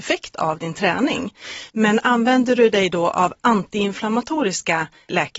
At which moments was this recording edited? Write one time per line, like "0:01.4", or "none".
0:01.7